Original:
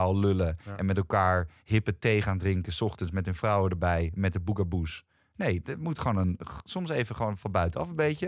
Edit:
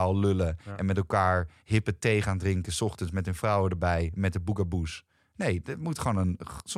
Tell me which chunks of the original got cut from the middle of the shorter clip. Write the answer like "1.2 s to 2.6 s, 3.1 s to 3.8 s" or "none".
none

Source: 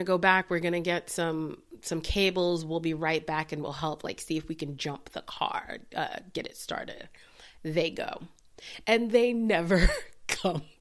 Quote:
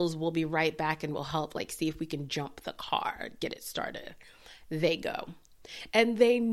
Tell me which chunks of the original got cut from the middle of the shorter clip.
5.9 s to 6.3 s

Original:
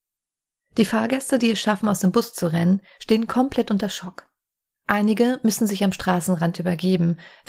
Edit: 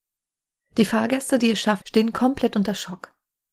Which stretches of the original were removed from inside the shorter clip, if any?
1.8 s to 3.0 s

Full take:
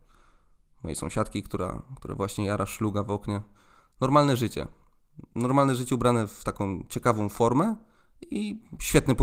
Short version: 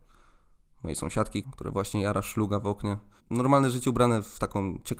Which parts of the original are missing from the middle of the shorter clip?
1.4 s to 1.9 s, 3.6 s to 5.2 s

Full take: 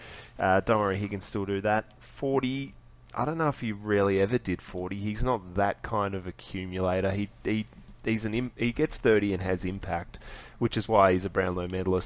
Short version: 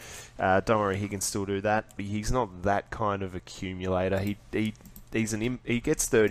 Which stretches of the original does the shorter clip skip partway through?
2.0 s to 4.9 s

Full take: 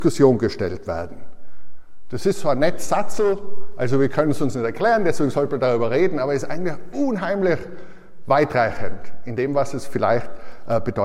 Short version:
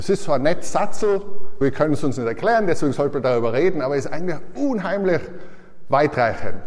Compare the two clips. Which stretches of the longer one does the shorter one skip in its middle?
3.8 s to 4.0 s

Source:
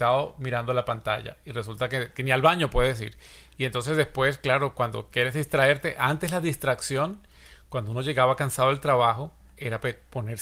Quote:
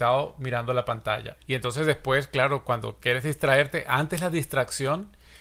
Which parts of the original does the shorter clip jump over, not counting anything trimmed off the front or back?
1.4 s to 3.5 s

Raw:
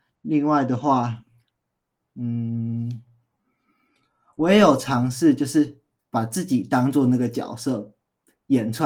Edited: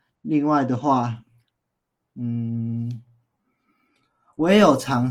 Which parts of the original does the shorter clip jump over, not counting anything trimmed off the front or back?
none

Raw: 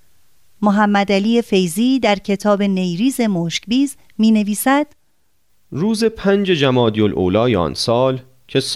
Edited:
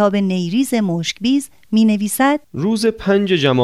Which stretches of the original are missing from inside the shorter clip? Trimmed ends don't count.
4.9 s to 5.6 s

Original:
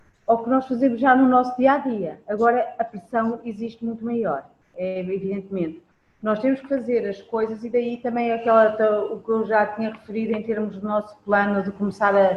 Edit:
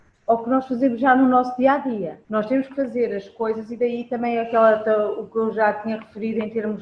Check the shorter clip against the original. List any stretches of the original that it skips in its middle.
2.2 s to 6.2 s

